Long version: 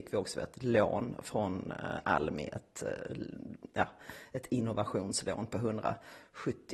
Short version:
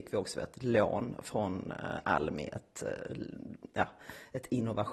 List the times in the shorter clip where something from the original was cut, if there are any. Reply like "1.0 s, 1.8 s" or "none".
none